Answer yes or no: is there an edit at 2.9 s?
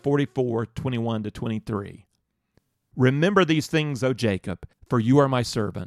no